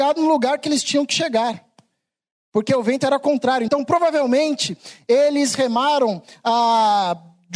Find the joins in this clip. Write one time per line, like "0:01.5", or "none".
none